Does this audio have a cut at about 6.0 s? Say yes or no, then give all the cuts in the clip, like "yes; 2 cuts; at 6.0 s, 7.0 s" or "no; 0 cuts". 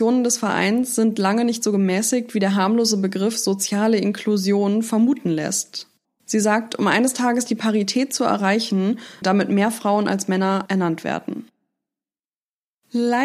yes; 2 cuts; at 6.0 s, 9.2 s